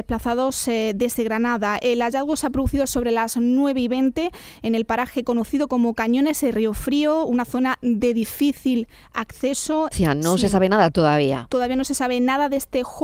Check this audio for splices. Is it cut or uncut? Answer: cut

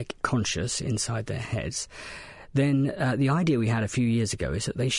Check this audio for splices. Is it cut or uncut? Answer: uncut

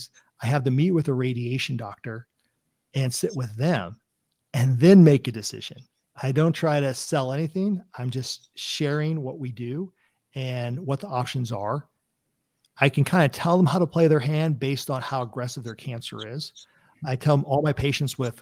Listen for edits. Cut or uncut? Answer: uncut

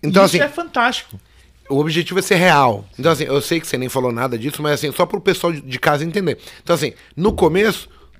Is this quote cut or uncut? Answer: cut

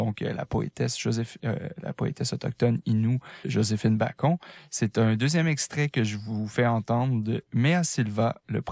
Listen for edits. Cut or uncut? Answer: cut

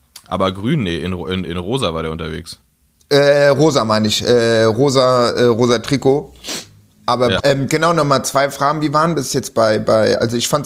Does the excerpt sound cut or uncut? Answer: cut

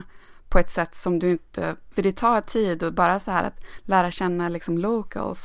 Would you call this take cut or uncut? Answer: cut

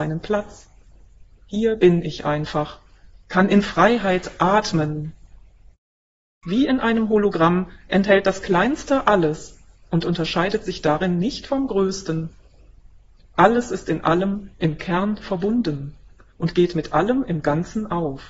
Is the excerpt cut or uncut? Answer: uncut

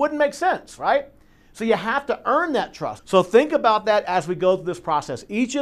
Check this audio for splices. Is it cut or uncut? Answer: cut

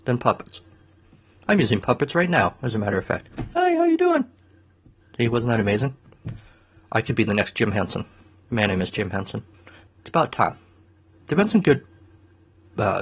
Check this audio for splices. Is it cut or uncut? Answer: cut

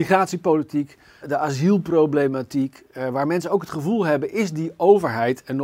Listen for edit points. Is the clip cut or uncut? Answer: cut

